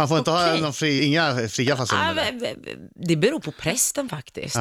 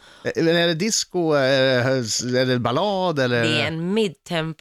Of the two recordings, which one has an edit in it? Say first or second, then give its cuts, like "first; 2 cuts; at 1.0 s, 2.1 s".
first; 1 cut; at 1.0 s